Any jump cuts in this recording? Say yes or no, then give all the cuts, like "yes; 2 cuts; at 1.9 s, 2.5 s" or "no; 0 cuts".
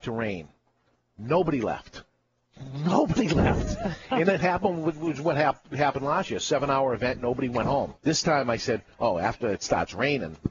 yes; 1 cut; at 8.0 s